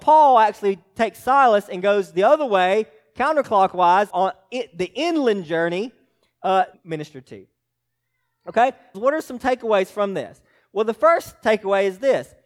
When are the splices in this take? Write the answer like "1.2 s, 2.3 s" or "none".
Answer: 4.1 s, 6.7 s, 8.9 s